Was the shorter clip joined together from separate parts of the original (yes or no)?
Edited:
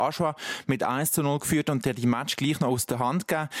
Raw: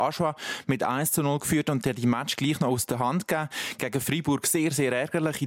no